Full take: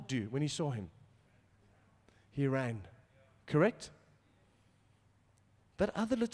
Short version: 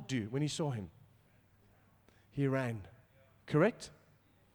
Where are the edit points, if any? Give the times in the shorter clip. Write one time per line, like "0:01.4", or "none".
none